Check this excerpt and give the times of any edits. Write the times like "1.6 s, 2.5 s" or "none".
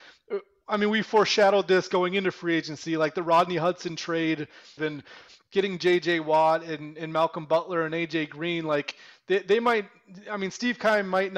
4.8 s